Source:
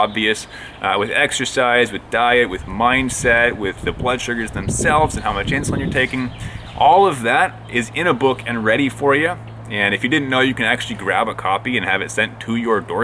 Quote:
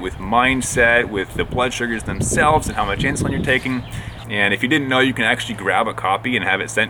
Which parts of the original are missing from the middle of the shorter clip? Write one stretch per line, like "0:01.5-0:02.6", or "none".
0:06.7-0:09.6